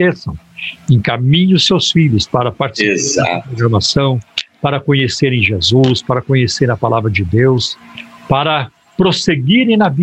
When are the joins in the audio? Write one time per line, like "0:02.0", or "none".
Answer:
none